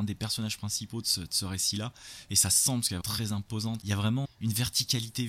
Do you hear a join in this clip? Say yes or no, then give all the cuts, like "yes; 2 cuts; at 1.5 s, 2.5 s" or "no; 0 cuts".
yes; 2 cuts; at 3.0 s, 4.2 s